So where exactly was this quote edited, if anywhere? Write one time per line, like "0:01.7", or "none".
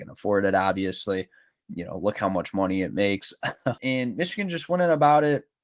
0:03.8